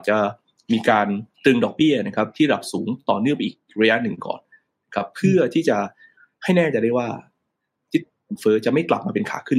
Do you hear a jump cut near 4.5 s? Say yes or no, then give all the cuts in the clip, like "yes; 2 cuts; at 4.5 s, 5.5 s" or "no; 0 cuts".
no; 1 cut; at 1.3 s